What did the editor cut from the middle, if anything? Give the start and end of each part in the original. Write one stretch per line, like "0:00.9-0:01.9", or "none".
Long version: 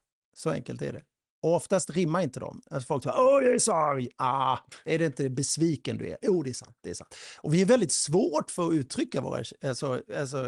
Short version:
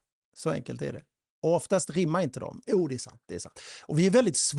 0:02.6-0:06.2